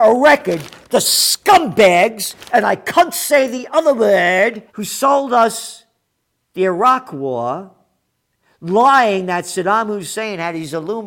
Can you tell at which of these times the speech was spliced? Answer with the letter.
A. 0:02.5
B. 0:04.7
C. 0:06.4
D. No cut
B